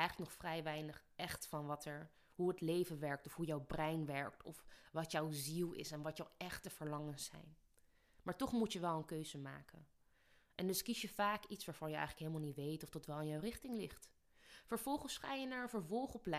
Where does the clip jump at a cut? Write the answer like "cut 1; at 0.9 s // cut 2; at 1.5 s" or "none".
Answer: none